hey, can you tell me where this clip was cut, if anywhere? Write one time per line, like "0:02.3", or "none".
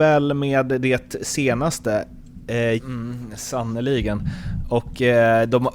0:02.8